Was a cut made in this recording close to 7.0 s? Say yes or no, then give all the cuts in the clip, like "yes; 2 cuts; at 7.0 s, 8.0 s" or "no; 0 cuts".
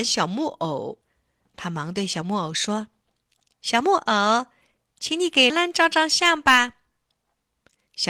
no; 2 cuts; at 1.0 s, 5.5 s